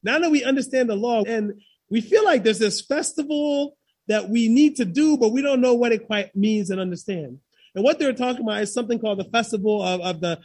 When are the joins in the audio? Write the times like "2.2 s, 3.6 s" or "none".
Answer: 1.2 s